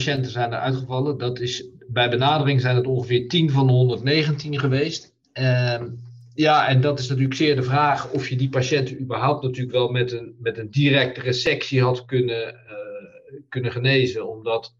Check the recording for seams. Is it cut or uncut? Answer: uncut